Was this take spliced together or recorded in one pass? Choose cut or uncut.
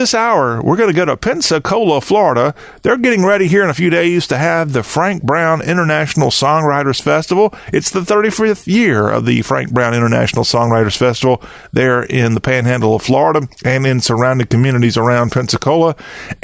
uncut